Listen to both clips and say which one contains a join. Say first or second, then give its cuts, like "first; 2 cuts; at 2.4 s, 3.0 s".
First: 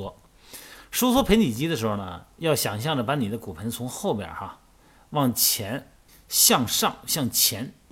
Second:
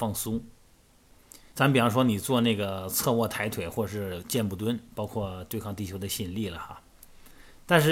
second; 2 cuts; at 1.5 s, 4.9 s